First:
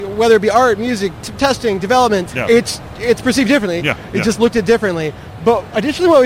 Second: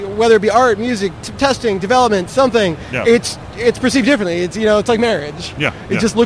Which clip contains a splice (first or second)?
first